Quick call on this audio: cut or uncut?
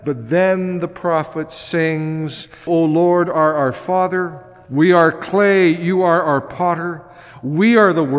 cut